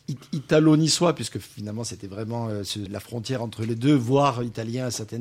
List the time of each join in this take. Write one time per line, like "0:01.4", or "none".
0:02.9